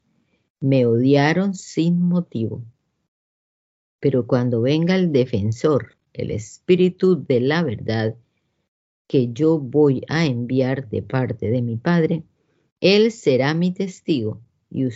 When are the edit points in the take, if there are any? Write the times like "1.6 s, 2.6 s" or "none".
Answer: none